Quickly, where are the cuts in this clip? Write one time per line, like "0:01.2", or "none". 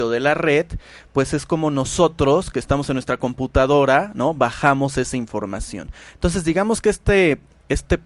none